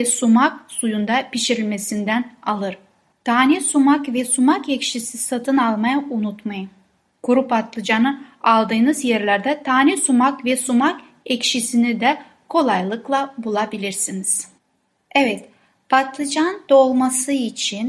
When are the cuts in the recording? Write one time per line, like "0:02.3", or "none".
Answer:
0:03.1